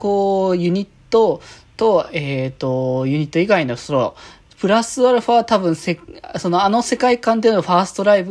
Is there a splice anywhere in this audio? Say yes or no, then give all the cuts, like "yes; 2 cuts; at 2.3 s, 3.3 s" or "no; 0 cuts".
no; 0 cuts